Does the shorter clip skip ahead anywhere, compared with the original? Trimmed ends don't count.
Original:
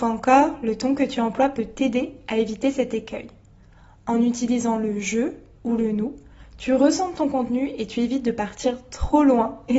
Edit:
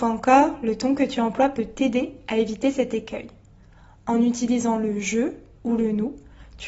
no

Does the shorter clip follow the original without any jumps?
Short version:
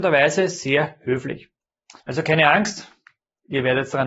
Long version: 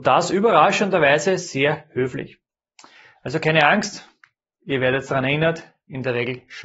no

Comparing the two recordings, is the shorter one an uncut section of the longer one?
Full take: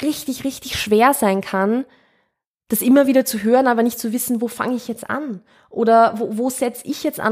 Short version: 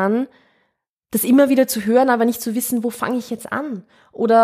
yes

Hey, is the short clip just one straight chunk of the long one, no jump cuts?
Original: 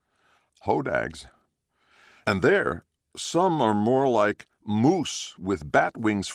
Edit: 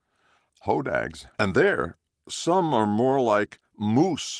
no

